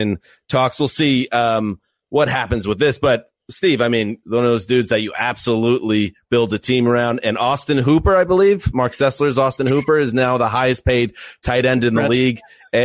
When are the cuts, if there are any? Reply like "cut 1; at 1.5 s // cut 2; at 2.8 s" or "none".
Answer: cut 1; at 4.2 s